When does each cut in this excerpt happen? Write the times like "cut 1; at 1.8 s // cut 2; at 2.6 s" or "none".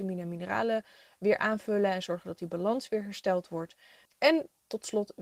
cut 1; at 4.1 s

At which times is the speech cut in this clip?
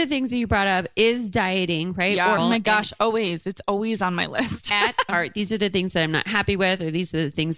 cut 1; at 2.4 s // cut 2; at 5.1 s

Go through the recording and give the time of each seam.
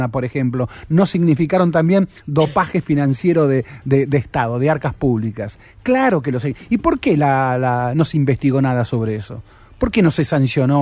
none

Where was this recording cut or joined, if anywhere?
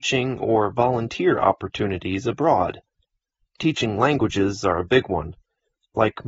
none

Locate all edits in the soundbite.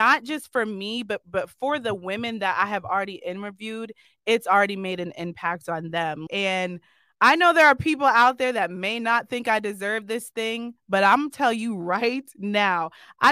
cut 1; at 6.3 s

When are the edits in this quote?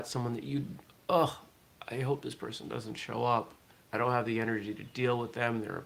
none

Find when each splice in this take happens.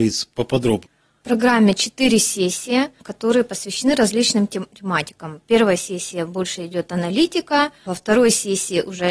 none

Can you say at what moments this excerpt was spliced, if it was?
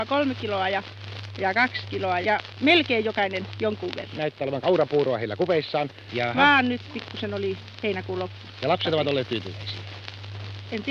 cut 1; at 2.2 s // cut 2; at 4.2 s // cut 3; at 6.1 s

